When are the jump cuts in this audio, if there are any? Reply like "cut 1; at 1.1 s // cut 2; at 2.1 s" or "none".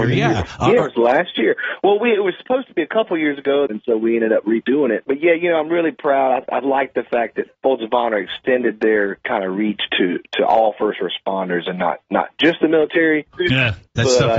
cut 1; at 3.7 s // cut 2; at 13.3 s